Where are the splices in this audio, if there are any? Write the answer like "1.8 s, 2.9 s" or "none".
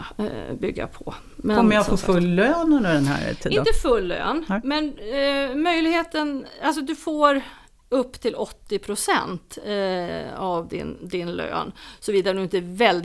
none